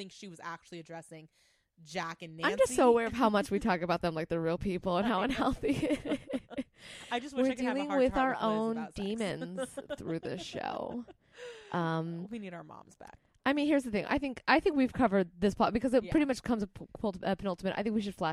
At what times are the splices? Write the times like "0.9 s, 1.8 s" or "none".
none